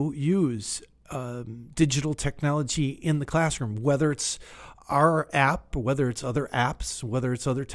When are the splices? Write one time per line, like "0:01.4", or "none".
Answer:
0:05.7